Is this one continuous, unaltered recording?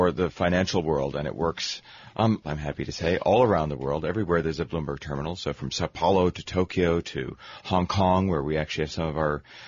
no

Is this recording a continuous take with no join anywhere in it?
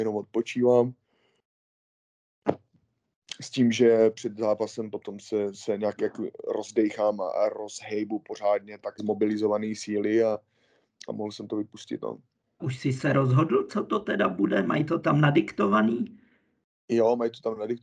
no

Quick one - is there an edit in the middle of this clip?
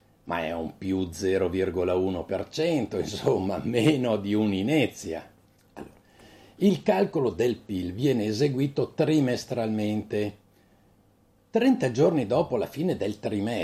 yes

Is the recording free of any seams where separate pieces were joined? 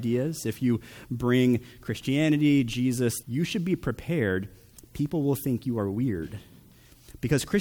no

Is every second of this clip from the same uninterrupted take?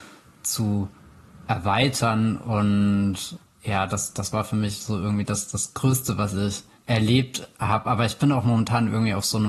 yes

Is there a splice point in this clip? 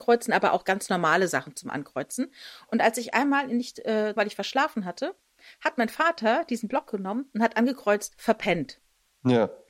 yes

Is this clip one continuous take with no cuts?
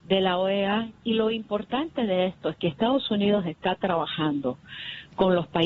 yes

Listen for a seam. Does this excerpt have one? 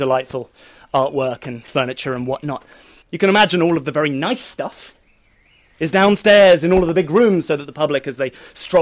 yes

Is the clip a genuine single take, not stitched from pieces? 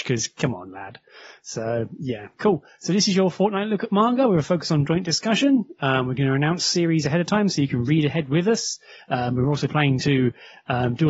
yes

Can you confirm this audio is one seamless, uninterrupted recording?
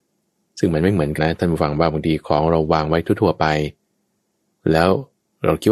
no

